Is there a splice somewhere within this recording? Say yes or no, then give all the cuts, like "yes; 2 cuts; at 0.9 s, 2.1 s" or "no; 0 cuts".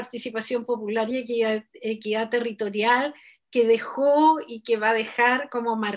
no; 0 cuts